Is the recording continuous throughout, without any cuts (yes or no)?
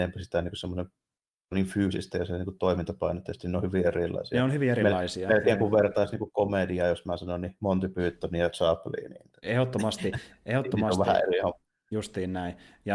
yes